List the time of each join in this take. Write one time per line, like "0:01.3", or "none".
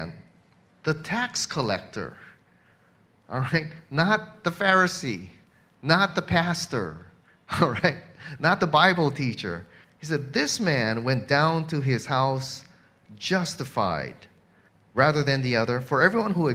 0:09.8